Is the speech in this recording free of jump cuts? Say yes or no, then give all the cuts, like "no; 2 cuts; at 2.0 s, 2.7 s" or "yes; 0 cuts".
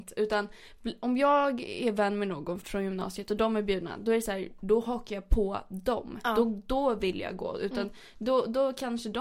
no; 1 cut; at 2.6 s